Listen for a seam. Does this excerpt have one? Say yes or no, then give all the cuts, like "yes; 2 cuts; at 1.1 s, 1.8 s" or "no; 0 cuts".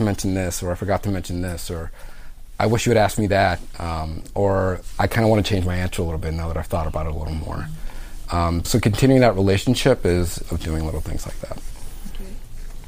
yes; 2 cuts; at 8.6 s, 10.4 s